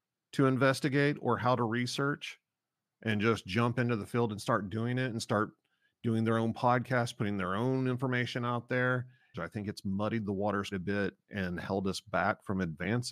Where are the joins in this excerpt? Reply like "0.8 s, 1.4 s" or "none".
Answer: 9.3 s, 10.7 s